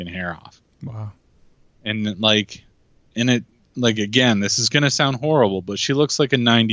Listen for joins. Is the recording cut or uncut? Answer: uncut